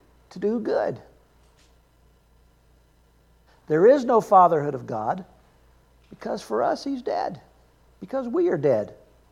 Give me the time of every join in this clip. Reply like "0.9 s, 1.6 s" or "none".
3.5 s